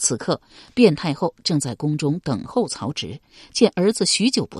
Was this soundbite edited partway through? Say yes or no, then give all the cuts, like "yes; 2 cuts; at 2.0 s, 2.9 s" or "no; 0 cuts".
no; 0 cuts